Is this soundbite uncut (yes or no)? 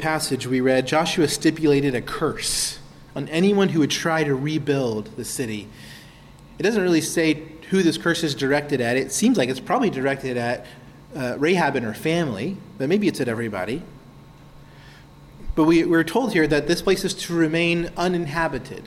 yes